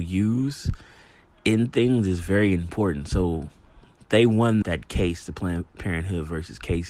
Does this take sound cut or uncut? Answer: cut